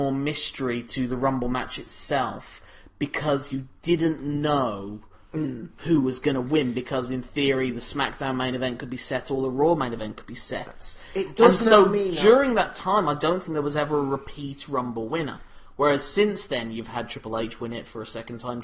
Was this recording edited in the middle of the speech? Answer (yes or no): no